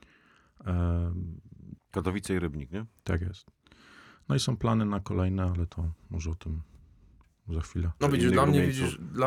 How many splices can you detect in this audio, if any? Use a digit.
2